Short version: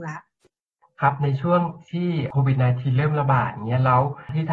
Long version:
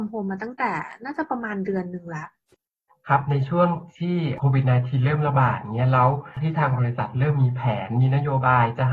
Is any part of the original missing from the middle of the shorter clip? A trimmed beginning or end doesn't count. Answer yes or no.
no